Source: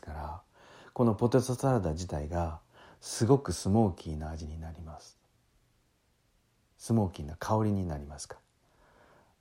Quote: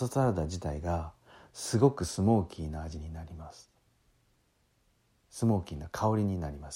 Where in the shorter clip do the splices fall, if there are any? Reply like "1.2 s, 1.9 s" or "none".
none